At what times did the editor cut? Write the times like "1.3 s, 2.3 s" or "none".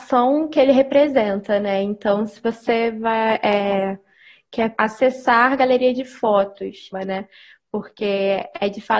4.7 s, 6.9 s